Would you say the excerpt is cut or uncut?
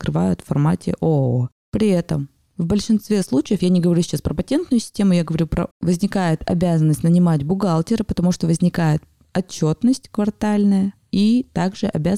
cut